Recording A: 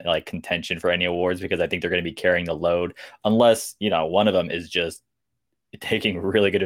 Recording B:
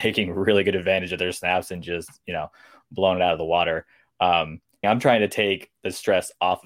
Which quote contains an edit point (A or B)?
B